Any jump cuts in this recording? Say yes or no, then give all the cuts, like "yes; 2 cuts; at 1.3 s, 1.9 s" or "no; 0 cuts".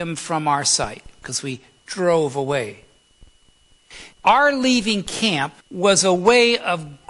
yes; 2 cuts; at 4.1 s, 5.6 s